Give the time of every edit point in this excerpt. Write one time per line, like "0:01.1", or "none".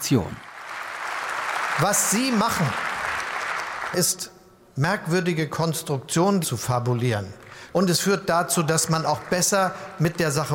0:03.9
0:06.4
0:07.7